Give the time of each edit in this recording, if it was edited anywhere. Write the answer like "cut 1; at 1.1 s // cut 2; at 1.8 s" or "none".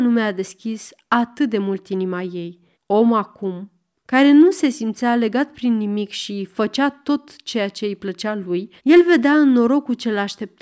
cut 1; at 2.7 s // cut 2; at 8.8 s